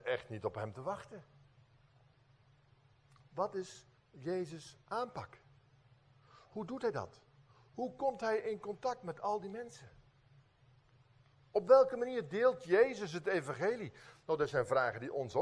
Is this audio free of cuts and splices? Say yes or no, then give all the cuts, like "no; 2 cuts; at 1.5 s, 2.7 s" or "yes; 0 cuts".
no; 1 cut; at 4.0 s